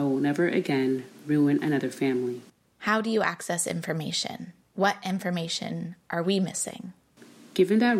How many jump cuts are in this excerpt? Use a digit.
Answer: 1